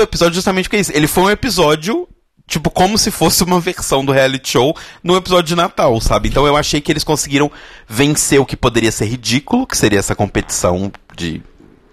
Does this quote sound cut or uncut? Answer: uncut